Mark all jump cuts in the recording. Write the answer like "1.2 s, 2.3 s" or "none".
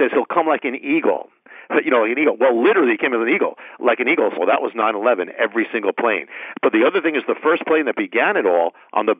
4.4 s